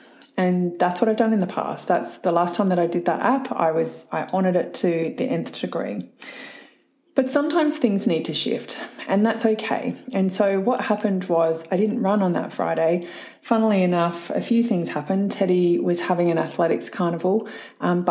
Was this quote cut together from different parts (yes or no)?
no